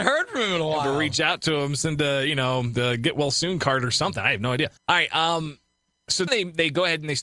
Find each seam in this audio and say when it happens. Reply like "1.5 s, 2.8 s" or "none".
4.8 s, 6.3 s

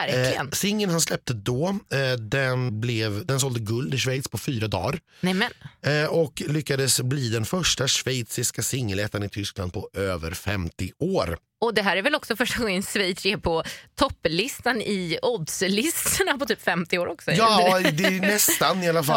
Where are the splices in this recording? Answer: 2.7 s

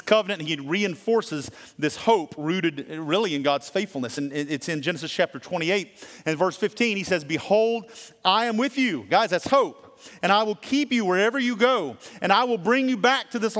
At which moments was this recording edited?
none

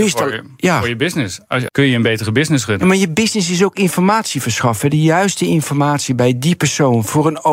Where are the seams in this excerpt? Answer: 1.7 s

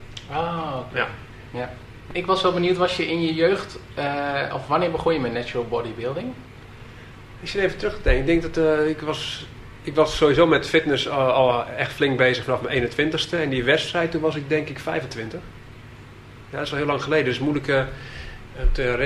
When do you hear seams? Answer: none

